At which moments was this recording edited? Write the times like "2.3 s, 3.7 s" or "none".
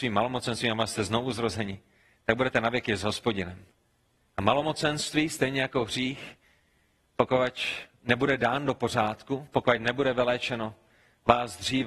4.3 s